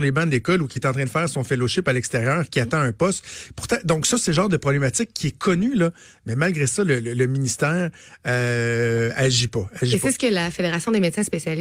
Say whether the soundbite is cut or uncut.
uncut